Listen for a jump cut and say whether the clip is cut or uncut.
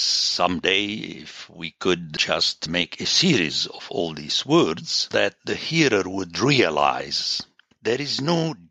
cut